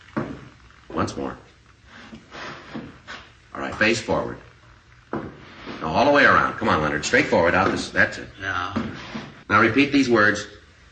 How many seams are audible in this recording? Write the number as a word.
two